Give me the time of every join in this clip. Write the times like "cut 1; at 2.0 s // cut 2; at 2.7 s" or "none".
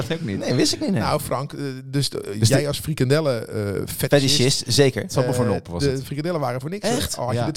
none